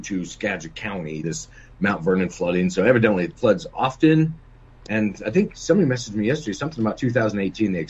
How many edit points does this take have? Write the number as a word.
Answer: one